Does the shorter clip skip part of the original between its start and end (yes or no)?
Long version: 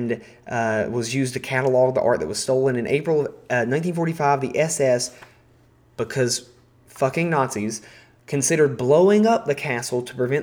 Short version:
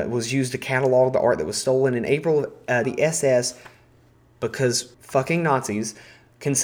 yes